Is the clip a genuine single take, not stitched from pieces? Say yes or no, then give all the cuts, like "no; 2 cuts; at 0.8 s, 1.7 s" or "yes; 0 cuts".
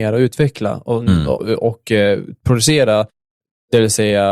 no; 1 cut; at 1.4 s